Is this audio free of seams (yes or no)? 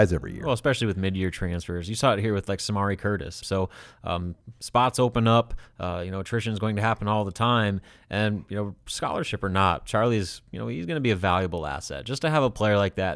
no